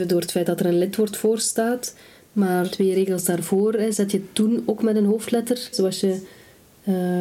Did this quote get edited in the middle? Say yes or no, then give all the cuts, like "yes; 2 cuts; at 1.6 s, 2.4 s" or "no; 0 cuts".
yes; 2 cuts; at 2.7 s, 5.7 s